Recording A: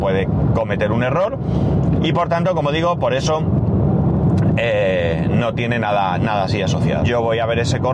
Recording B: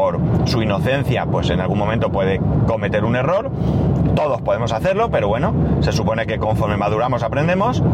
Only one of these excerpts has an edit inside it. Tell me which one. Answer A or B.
A